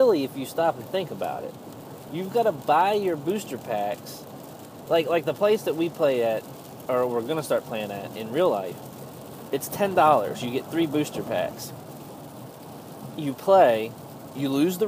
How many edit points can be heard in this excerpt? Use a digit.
0